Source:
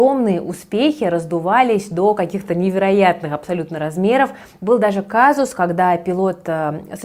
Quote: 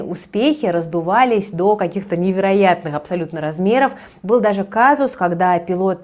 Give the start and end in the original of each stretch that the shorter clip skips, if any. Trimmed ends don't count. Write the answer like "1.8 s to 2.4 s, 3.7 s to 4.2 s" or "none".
none